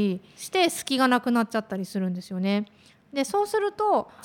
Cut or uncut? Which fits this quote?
uncut